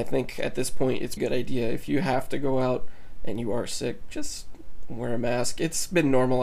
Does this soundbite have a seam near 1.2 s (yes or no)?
yes